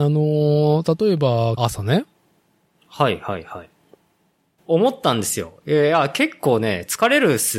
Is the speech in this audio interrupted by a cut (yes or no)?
yes